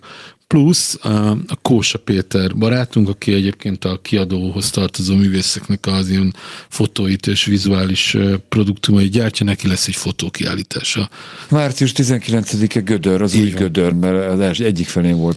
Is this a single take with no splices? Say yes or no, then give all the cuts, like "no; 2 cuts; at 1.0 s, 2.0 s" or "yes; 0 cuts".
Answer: no; 2 cuts; at 11.5 s, 13.9 s